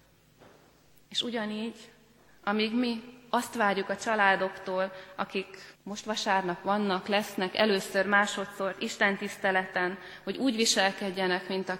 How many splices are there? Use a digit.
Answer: 2